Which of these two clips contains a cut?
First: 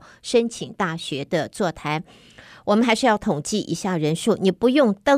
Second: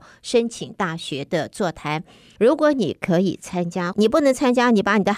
second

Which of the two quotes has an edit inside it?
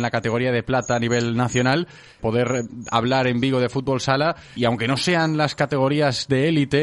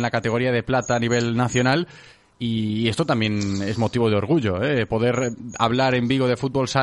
first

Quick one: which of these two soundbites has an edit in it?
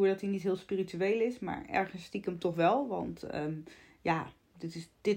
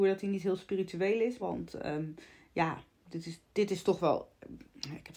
second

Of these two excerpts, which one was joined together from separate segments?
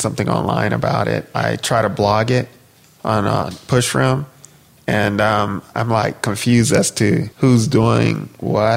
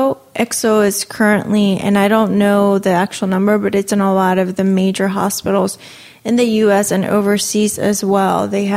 first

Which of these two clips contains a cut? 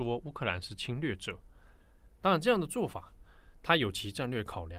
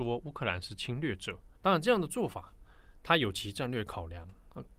second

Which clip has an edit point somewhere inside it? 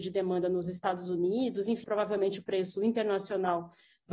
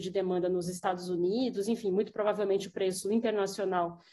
first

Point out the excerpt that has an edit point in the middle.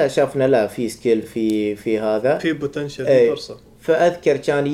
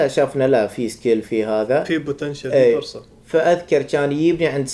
second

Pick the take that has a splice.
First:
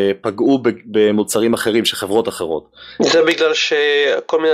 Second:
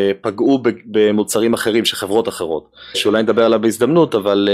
second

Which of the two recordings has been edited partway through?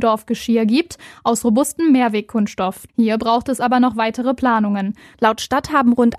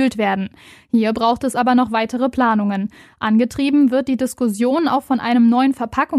first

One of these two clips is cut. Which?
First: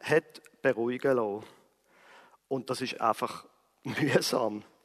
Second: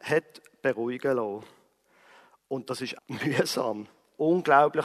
second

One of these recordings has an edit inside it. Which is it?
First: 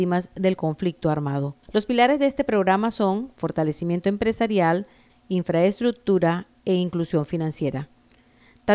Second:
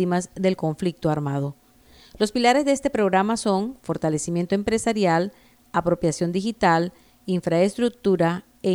first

